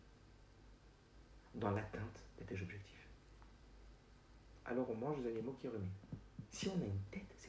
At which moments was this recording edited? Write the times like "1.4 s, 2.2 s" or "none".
4.6 s, 6.5 s